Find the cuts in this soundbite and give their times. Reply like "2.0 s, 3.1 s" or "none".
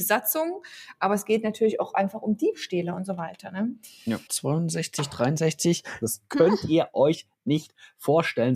4.3 s, 6.0 s